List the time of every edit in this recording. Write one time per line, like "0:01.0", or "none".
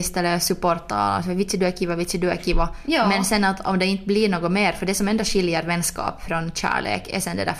none